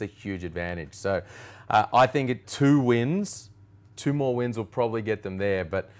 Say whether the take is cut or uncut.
cut